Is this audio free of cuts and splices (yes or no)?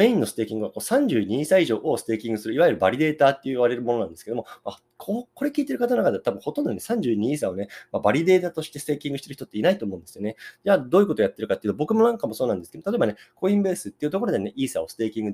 yes